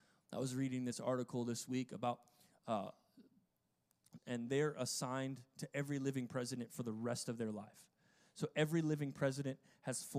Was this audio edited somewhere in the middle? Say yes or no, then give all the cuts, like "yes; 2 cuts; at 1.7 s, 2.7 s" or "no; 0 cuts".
yes; 1 cut; at 4.2 s